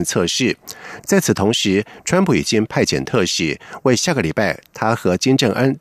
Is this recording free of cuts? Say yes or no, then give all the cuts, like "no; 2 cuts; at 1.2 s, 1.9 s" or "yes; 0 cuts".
no; 1 cut; at 1.0 s